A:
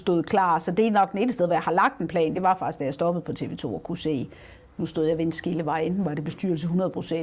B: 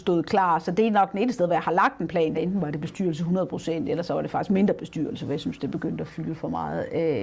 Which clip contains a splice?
B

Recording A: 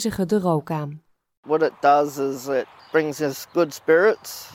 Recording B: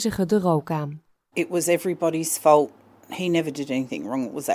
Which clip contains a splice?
B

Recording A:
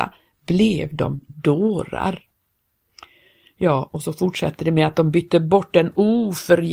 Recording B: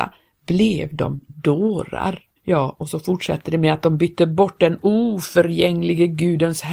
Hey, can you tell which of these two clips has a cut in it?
B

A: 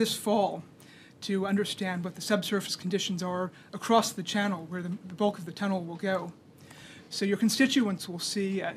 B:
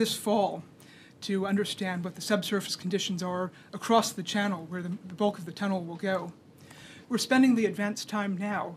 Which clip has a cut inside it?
B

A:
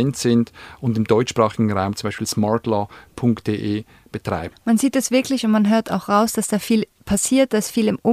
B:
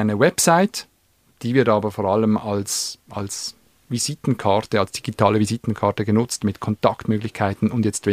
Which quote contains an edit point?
A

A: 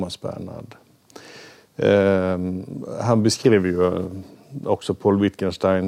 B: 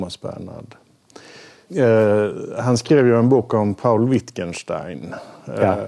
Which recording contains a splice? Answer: B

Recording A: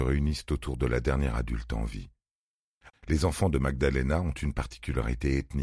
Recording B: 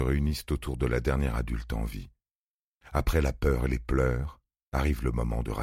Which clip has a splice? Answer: A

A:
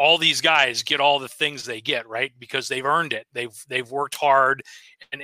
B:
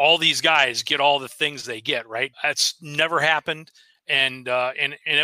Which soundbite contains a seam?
B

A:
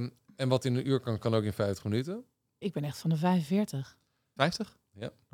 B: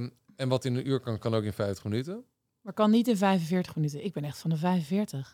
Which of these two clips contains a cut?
A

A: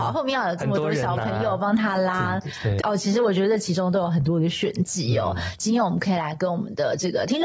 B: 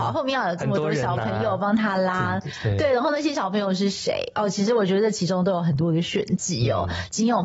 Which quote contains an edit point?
A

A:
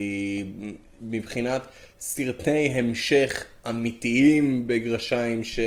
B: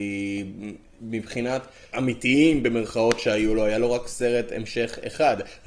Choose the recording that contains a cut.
B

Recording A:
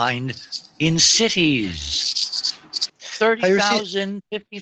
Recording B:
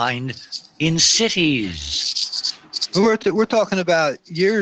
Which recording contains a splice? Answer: A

